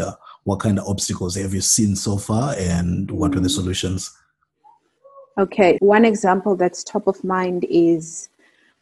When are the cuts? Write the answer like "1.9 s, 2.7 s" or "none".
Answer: 5.8 s